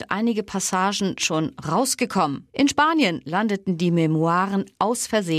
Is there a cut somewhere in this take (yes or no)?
yes